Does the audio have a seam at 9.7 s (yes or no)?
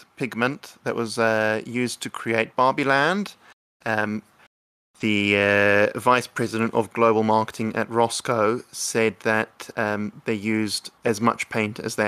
no